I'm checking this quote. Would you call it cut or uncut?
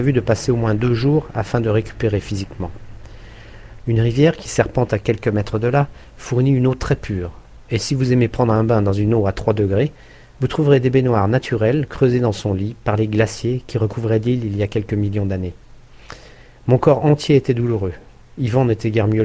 cut